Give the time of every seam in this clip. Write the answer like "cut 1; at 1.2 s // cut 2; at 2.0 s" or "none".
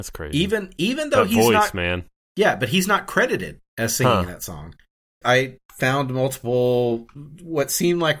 cut 1; at 5.2 s

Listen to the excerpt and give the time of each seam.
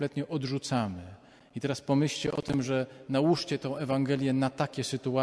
none

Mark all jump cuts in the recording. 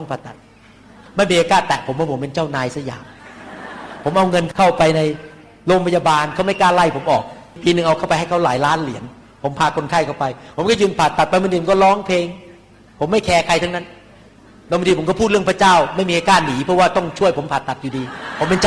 none

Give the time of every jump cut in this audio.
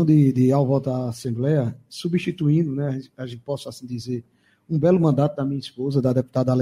none

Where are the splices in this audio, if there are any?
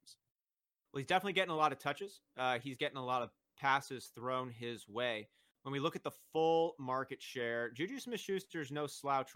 none

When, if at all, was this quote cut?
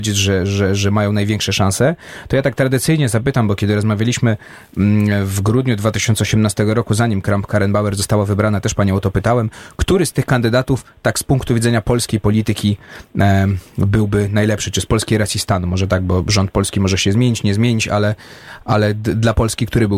none

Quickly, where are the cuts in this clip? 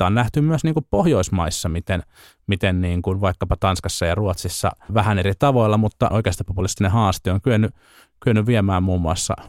cut 1; at 4.9 s // cut 2; at 6.1 s

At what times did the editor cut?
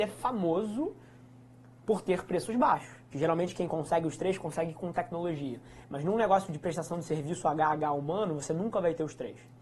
cut 1; at 3.1 s // cut 2; at 5.8 s

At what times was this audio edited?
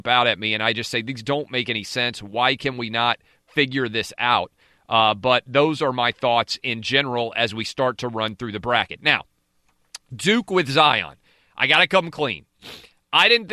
none

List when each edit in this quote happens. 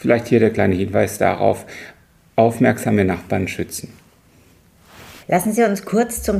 cut 1; at 5.2 s

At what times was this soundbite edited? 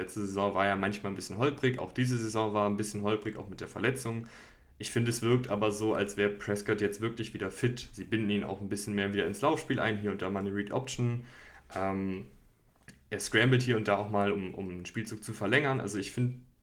none

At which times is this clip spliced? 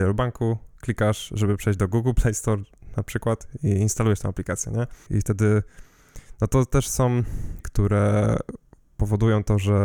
cut 1; at 5.1 s // cut 2; at 7.6 s

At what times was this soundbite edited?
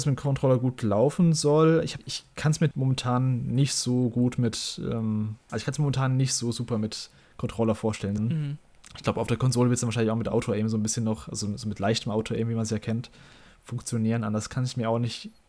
cut 1; at 8.2 s

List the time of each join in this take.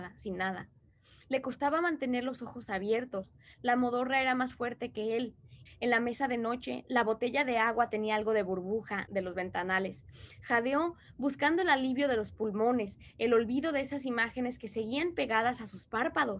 cut 1; at 5.7 s // cut 2; at 9.1 s

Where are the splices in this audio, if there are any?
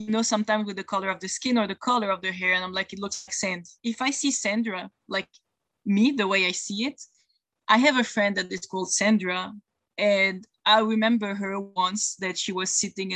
cut 1; at 3.8 s

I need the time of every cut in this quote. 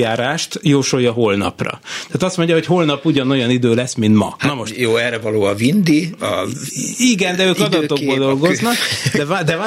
cut 1; at 4.4 s // cut 2; at 6.2 s

